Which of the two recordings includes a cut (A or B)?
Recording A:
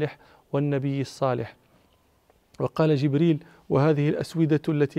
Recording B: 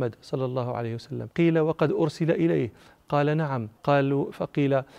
B